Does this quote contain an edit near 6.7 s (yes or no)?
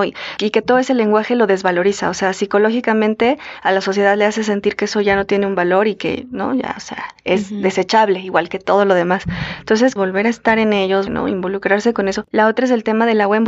no